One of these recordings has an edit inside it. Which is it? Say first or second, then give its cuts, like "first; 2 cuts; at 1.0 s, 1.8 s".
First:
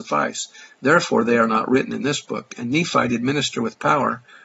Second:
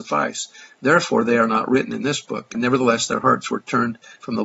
second; 1 cut; at 2.5 s